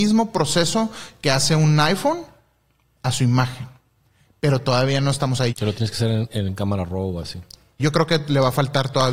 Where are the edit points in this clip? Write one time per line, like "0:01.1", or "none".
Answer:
0:05.5
0:07.8